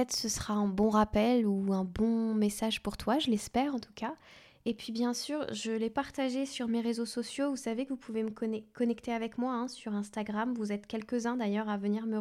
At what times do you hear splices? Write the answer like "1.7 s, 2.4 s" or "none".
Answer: none